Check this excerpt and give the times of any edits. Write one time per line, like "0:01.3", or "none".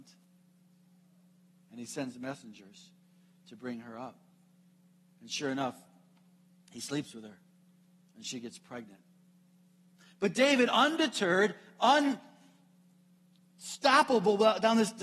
none

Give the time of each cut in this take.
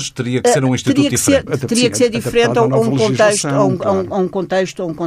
0:01.5

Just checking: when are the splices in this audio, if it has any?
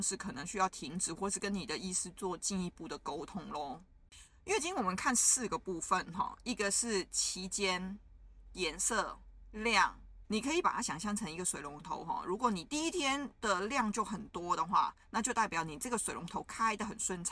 0:10.2

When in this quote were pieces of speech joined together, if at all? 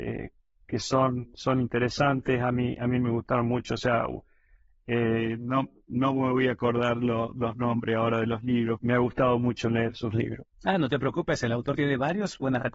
0:08.8

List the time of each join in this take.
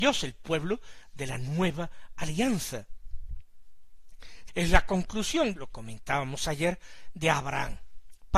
0:04.5
0:05.6

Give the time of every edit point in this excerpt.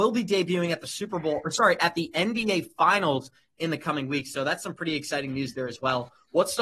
none

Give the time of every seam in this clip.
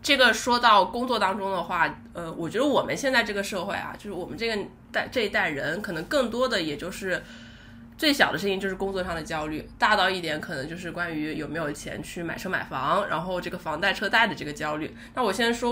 none

